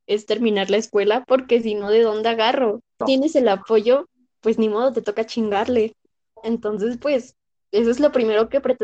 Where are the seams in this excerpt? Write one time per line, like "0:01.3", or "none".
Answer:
0:03.0